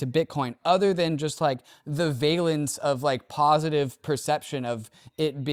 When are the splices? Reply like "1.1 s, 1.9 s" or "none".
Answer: none